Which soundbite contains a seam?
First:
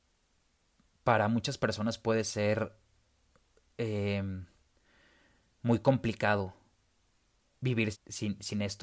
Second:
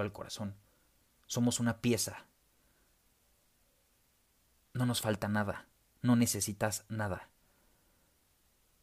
first; 1 cut; at 7.9 s

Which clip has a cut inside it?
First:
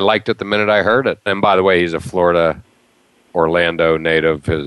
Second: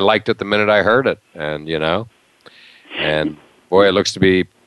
first; 1 cut; at 1.3 s

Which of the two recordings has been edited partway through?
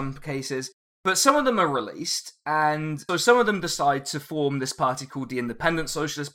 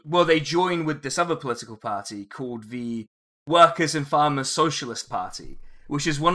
first; 1 cut; at 3.1 s

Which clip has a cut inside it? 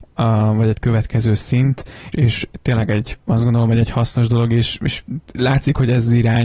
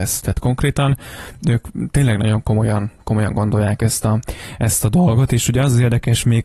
first; 1 cut; at 2.1 s

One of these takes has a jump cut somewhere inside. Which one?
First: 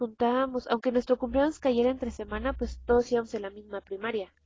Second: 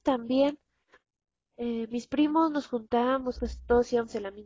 second; 2 cuts; at 1.9 s, 3.4 s

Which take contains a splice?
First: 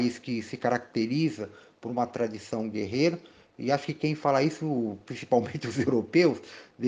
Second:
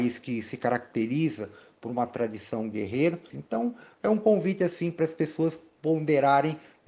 second; 1 cut; at 3.3 s

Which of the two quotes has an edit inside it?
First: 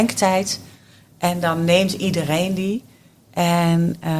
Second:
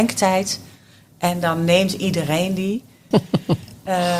second; 1 cut; at 3.1 s

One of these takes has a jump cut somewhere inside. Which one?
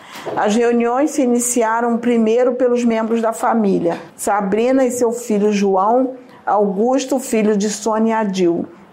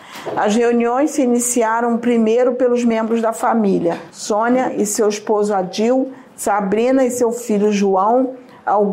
first; 1 cut; at 4.1 s

